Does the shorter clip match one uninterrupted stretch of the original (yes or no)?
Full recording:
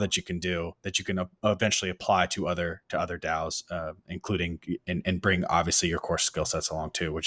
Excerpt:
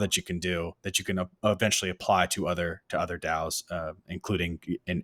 yes